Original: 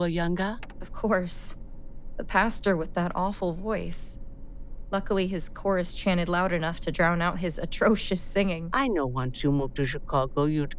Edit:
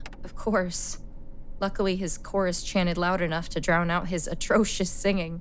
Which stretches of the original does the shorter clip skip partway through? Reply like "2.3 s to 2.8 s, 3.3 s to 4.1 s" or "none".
2.2 s to 4.9 s